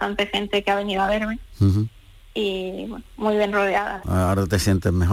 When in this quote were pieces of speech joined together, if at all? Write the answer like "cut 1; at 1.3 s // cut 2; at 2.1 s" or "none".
cut 1; at 4.0 s